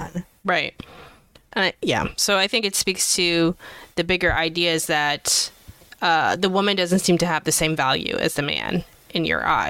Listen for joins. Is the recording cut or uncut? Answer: uncut